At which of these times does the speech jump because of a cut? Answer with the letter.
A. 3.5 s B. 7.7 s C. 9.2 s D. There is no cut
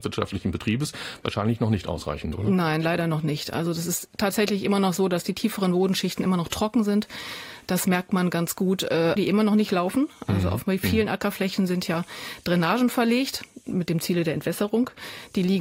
C